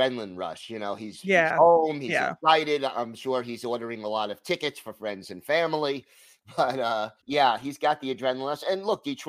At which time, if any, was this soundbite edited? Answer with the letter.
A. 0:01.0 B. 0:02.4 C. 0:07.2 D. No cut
C